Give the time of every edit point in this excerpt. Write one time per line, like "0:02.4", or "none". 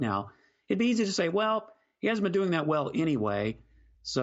none